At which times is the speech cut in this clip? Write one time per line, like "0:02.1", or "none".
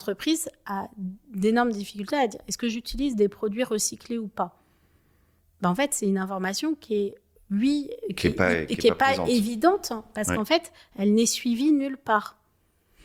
none